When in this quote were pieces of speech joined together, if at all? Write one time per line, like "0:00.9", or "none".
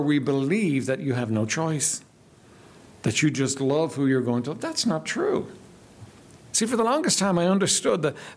0:06.5